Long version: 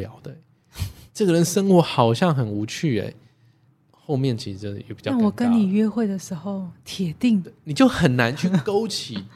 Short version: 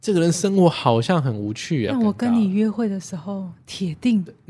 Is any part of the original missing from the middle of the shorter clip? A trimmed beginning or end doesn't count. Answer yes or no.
yes